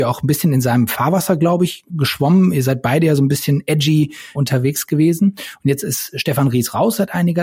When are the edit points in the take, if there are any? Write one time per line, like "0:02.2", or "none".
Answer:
0:01.9
0:04.3